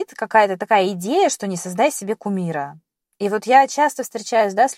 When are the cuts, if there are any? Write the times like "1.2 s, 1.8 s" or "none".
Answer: none